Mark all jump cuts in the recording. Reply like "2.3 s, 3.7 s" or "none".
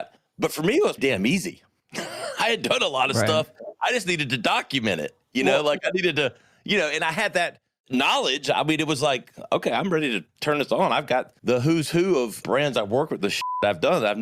1.0 s